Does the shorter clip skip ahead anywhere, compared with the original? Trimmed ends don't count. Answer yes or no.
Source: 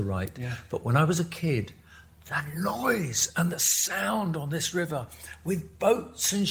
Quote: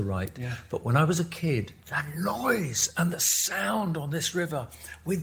yes